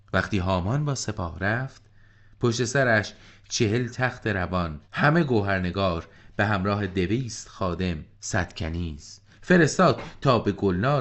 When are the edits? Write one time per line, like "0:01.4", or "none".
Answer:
0:04.9
0:08.1